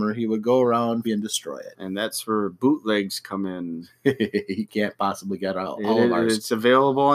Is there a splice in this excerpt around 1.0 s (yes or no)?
yes